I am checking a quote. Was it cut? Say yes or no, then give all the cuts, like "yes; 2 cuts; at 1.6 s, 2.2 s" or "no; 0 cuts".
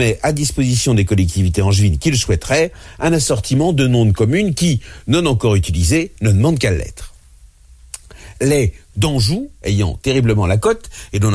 no; 0 cuts